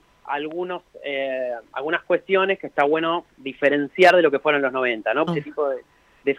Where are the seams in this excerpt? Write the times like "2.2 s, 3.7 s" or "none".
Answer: 5.3 s